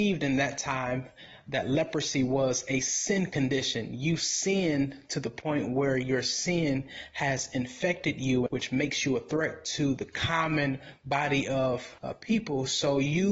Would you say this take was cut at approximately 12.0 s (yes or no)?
yes